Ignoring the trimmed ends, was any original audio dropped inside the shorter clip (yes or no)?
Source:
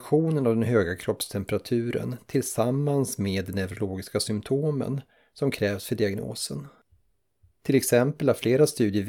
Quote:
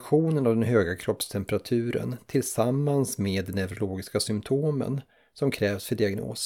no